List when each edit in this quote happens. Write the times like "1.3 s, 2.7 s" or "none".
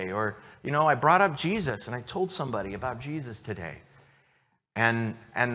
none

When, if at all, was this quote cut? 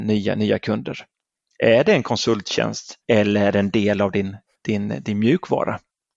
3.0 s

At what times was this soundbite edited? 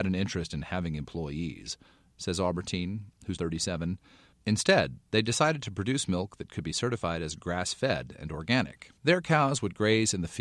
2.1 s, 3.4 s, 9.0 s

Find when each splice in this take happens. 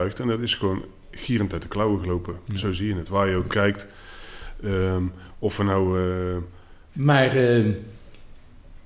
3.5 s, 6.9 s

